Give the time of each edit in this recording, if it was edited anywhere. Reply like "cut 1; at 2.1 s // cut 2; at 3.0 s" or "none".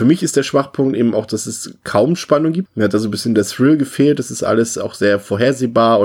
cut 1; at 2.7 s

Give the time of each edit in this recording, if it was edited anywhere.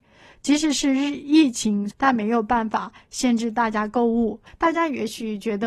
cut 1; at 1.9 s // cut 2; at 4.5 s

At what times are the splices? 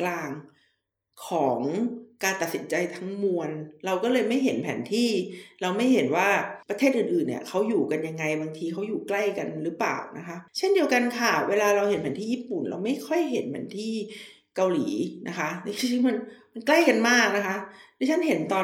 cut 1; at 6.6 s // cut 2; at 10.5 s

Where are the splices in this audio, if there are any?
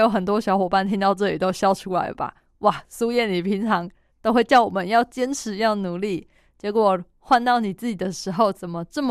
none

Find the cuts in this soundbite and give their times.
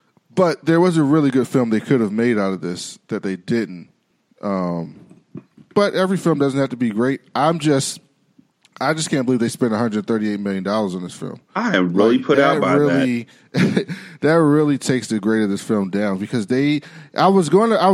none

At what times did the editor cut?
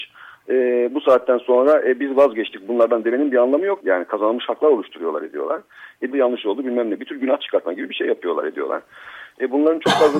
cut 1; at 3.8 s // cut 2; at 6.1 s

